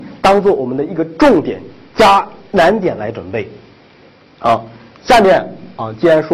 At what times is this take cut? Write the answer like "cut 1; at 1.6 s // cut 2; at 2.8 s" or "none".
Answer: none